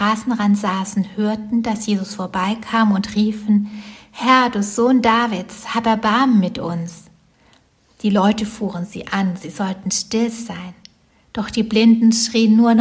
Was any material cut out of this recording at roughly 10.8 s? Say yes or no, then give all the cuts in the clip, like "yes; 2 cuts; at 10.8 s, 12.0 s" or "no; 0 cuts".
no; 0 cuts